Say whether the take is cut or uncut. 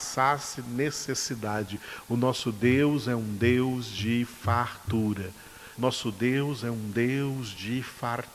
cut